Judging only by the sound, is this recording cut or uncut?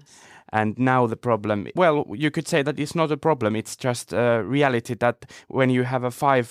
uncut